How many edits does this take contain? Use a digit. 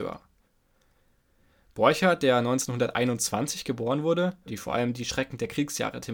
1